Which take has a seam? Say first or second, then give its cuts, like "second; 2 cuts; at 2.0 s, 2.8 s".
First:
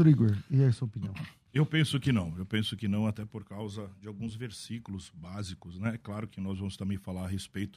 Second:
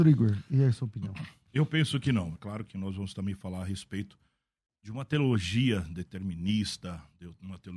second; 1 cut; at 2.3 s